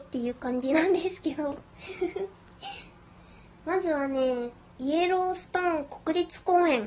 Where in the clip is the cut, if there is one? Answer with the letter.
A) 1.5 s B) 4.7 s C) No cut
B